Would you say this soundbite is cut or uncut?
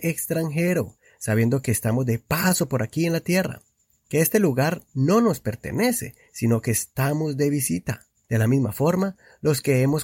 cut